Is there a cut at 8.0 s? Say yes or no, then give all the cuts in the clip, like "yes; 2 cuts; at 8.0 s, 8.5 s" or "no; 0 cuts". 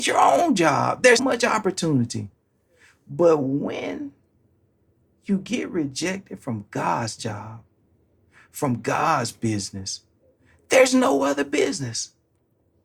no; 1 cut; at 1.2 s